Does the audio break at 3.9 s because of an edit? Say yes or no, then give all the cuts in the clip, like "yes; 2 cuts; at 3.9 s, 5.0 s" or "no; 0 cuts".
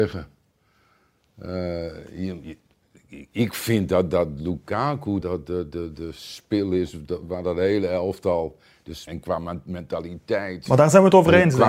no; 2 cuts; at 5.2 s, 9.1 s